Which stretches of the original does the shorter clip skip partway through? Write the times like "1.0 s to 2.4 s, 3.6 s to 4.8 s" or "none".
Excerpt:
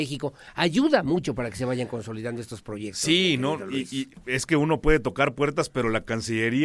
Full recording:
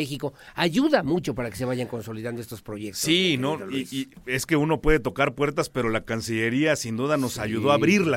none